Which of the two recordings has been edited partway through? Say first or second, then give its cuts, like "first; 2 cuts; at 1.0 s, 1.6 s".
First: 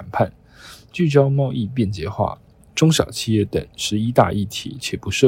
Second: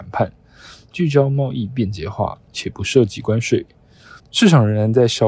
second; 2 cuts; at 2.5 s, 4.2 s